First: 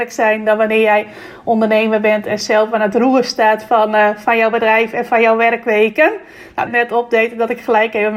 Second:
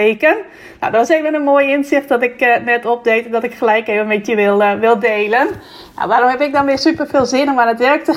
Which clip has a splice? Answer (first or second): first